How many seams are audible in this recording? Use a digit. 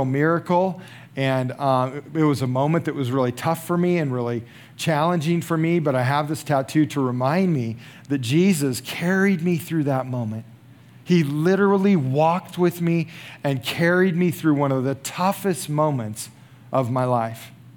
0